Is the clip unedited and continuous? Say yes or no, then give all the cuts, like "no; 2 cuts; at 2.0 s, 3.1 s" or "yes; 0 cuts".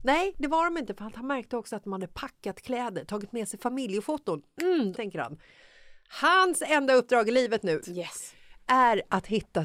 no; 2 cuts; at 4.9 s, 7.8 s